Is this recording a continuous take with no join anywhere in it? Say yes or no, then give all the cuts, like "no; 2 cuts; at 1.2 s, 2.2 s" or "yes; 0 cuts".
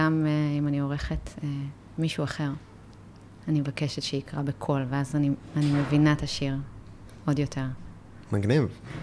yes; 0 cuts